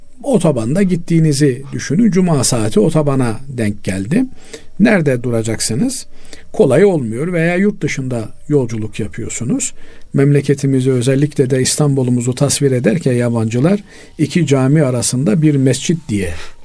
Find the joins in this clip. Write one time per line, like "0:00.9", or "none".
0:10.1